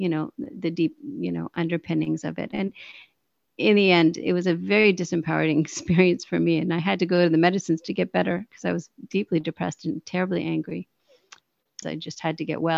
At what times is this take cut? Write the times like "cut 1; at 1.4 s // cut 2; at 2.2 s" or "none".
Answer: cut 1; at 11.8 s